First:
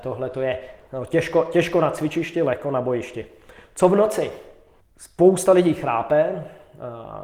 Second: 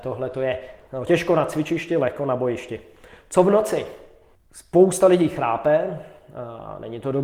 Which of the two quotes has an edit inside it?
second; 1 cut; at 1.1 s

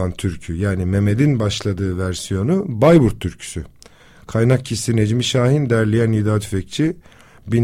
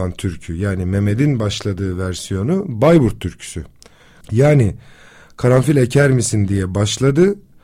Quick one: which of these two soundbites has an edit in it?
second; 1 cut; at 4.2 s

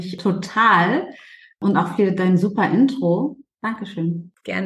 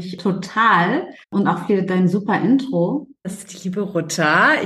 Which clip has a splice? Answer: second; 2 cuts; at 1.2 s, 3.2 s

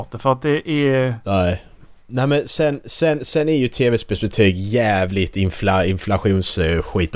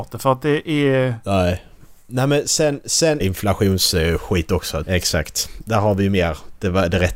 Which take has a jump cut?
second; 2 cuts; at 3.2 s, 4.8 s

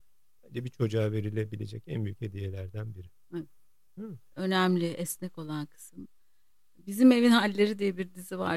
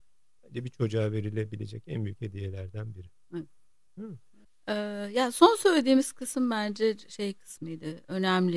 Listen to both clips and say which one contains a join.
first; 1 cut; at 4.3 s

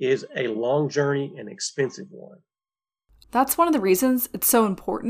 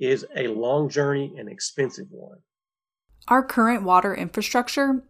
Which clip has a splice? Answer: first; 1 cut; at 3.2 s

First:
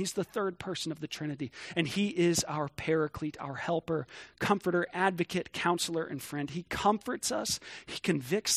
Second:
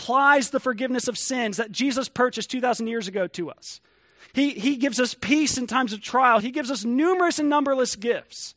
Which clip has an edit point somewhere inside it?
second; 2 cuts; at 4.3 s, 6.4 s

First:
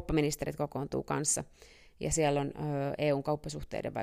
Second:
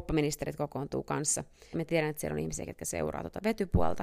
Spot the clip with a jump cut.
second; 1 cut; at 1.7 s

